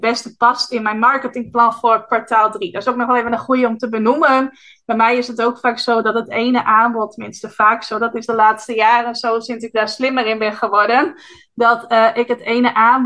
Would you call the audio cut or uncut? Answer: uncut